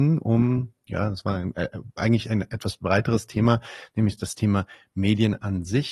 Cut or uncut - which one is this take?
uncut